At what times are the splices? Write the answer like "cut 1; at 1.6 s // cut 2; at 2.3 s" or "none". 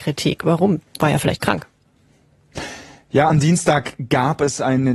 none